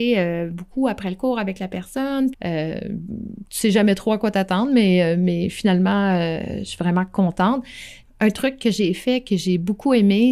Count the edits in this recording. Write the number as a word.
one